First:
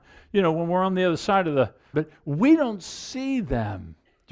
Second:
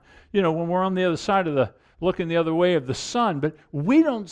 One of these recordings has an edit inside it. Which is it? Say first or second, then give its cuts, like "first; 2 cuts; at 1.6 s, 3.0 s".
first; 1 cut; at 1.9 s